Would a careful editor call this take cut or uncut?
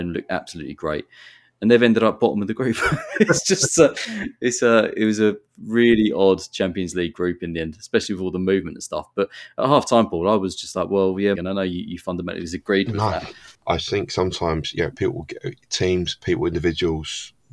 cut